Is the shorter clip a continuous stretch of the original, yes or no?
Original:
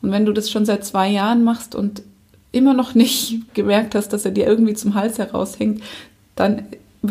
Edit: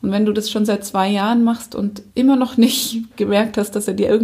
no